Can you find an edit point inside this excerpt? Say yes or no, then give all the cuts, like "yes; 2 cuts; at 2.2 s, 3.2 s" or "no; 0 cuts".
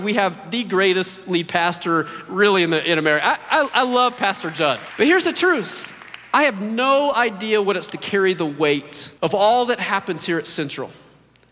yes; 3 cuts; at 4.9 s, 7.9 s, 9.2 s